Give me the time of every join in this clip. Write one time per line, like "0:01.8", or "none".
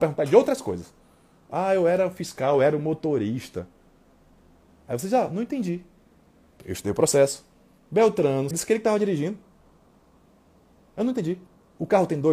0:01.5
0:08.5